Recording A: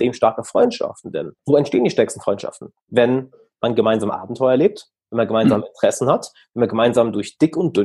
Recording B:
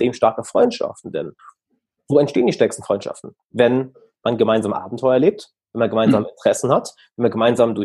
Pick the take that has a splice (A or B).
A